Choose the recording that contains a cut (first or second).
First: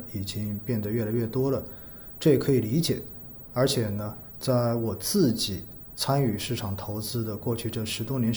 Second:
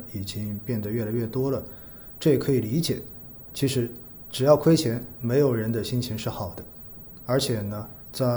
first